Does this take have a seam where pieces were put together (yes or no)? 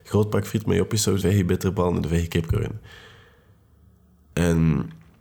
yes